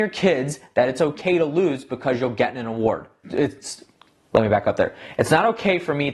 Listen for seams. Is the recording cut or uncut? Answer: cut